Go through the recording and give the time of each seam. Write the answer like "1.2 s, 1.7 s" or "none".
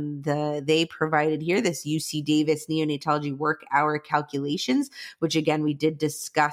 none